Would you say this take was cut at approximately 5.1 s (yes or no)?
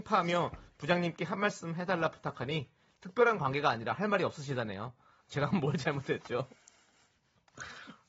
no